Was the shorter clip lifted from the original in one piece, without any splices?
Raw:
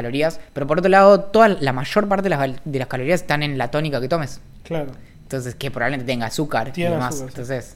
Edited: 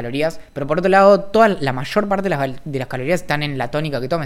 yes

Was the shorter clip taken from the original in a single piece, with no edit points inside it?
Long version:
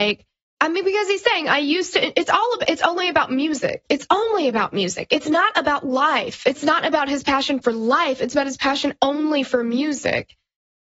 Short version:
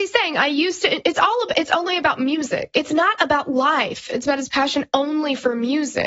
no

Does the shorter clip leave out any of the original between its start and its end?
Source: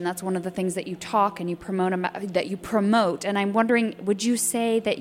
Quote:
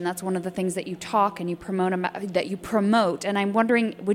no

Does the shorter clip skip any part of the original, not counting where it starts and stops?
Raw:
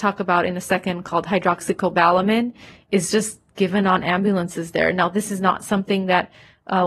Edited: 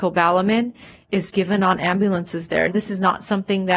yes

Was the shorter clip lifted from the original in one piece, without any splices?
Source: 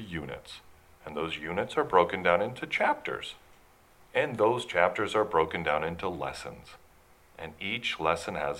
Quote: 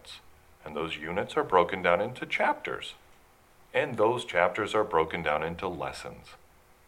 yes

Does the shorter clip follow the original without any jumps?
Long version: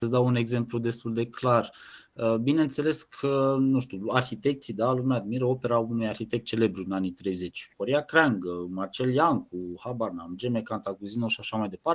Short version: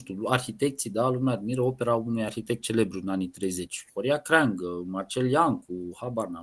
yes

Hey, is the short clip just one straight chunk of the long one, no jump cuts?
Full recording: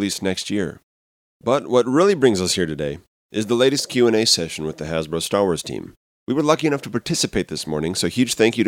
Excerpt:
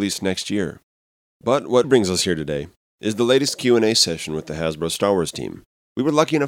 no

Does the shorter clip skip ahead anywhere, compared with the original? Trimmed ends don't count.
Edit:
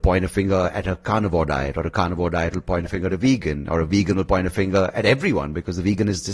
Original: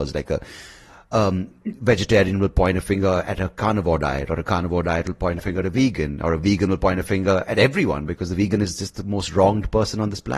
no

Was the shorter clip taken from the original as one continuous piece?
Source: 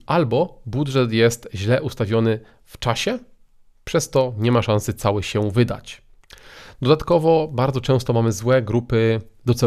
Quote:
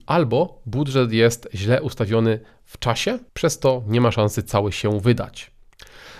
no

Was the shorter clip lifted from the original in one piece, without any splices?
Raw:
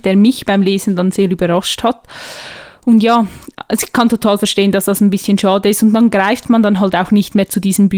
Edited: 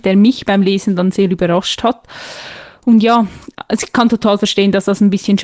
yes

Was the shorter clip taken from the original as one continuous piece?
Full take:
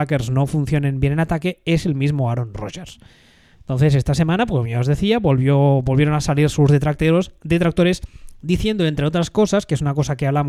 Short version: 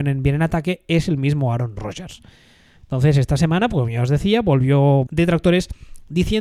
no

